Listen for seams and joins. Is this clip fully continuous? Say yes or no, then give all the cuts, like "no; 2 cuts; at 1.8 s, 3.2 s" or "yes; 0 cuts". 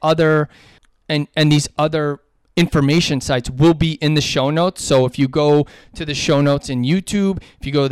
yes; 0 cuts